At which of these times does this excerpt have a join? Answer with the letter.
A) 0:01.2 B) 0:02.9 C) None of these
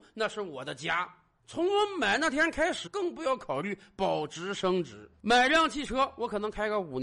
B